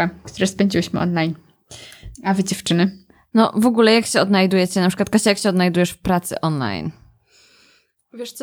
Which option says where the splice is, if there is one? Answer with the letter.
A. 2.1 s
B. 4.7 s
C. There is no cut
A